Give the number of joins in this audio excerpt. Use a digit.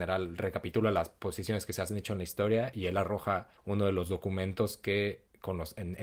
1